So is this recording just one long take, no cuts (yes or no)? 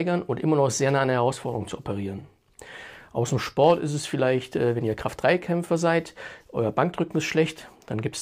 yes